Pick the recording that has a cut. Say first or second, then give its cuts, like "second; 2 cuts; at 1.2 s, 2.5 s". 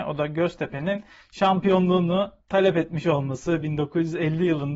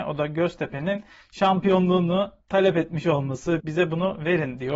second; 1 cut; at 3.6 s